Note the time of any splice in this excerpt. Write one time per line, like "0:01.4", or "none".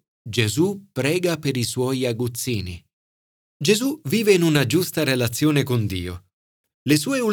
0:03.4